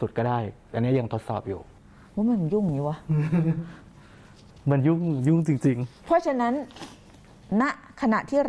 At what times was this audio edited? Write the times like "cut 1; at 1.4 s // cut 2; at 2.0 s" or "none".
none